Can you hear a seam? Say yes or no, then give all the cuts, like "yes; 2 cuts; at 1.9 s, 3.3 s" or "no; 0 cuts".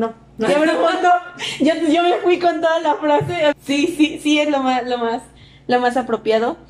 yes; 1 cut; at 3.5 s